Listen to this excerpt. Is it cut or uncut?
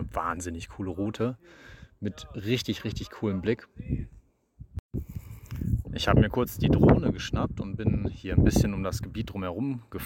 cut